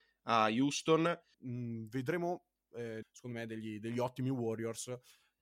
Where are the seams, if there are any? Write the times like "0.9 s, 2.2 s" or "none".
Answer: 1.3 s, 3.0 s